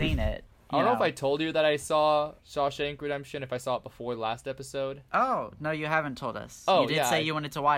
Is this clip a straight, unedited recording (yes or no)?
no